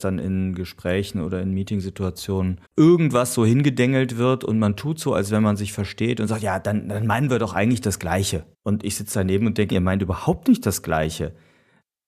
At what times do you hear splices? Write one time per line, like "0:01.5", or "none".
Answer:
0:02.6
0:08.5
0:09.7